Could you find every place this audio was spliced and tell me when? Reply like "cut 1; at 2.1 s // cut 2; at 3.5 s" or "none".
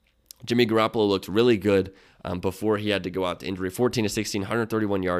none